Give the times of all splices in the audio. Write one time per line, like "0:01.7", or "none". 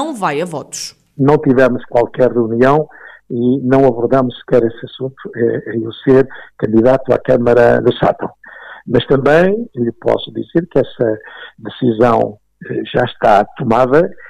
0:07.8